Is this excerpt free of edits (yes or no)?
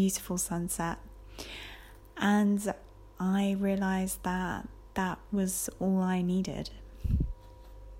no